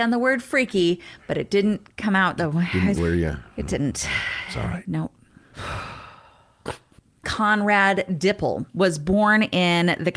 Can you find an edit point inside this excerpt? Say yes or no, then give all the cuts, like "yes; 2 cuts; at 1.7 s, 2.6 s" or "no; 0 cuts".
yes; 1 cut; at 3.0 s